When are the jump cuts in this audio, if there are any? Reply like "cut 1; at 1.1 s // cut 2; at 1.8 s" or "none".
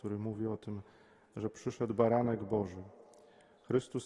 none